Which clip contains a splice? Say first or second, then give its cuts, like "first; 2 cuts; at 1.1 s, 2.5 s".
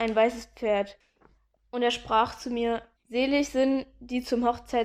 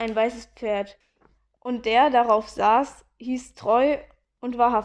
first; 2 cuts; at 1.6 s, 3.0 s